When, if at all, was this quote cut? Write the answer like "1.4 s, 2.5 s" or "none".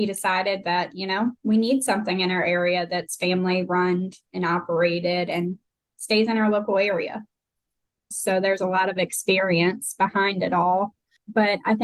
1.4 s, 8.1 s

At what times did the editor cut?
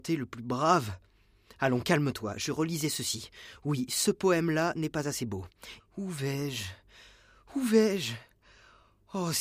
5.8 s

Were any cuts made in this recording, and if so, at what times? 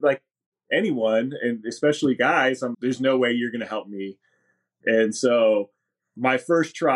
2.7 s, 4.8 s

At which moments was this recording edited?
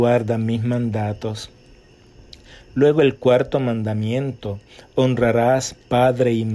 none

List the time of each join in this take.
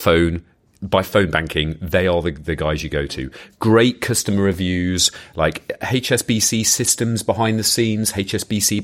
none

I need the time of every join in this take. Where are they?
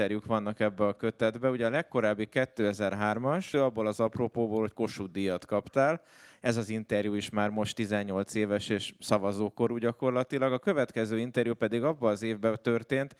3.5 s

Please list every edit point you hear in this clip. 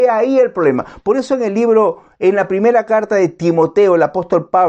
none

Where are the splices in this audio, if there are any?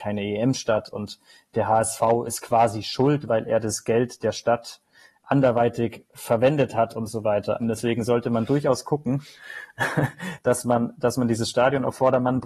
7.6 s

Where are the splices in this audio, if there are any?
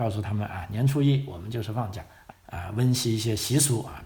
2.3 s

